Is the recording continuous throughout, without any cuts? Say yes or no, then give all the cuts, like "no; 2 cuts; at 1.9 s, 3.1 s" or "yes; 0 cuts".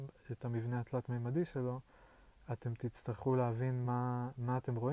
yes; 0 cuts